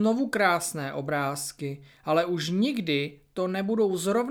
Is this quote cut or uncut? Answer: uncut